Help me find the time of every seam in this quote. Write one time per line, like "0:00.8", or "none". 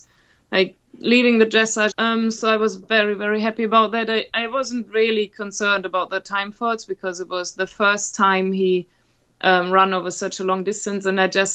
0:01.9

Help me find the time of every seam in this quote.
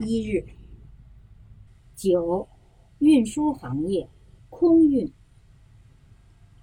0:04.4

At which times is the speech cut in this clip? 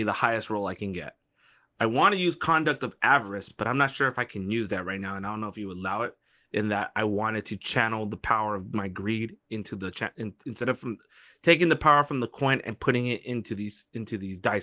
none

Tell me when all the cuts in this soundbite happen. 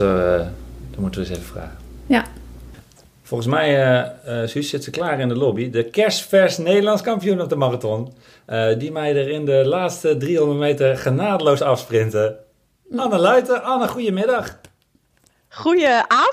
none

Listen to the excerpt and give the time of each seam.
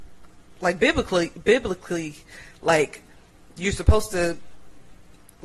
none

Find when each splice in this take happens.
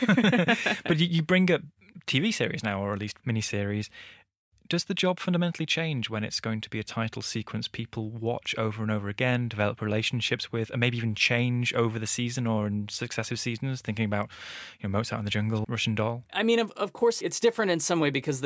0:15.6

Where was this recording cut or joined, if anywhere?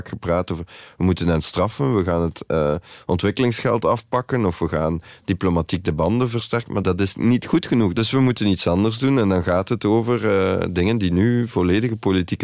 none

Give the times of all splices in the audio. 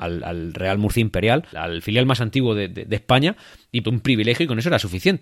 0:01.5
0:03.8

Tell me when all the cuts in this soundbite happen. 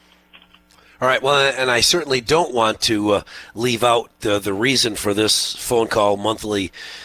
none

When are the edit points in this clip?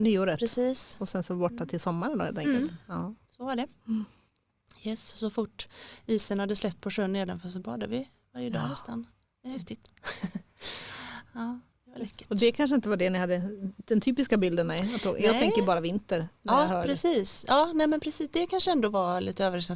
none

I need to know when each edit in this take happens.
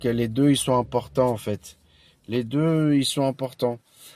none

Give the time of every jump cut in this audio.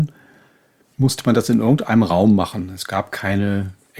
none

